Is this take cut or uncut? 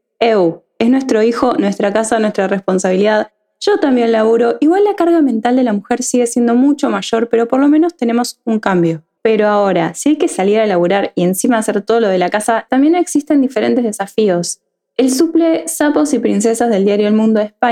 cut